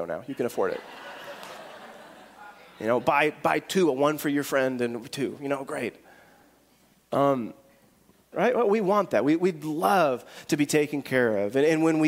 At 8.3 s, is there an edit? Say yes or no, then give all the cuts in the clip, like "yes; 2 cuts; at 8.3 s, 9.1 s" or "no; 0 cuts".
yes; 1 cut; at 8.3 s